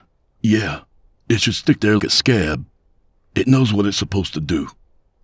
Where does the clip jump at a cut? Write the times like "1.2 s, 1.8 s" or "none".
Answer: 2.0 s